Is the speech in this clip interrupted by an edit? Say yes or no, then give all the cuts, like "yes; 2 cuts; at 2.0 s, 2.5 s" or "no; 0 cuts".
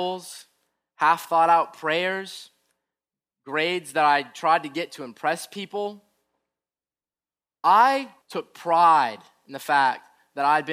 yes; 1 cut; at 8.2 s